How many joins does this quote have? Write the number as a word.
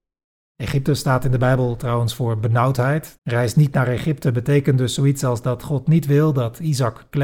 one